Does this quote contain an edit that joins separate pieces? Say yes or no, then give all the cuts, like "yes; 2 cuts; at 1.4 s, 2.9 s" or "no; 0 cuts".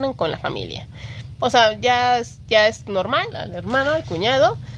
yes; 1 cut; at 3.3 s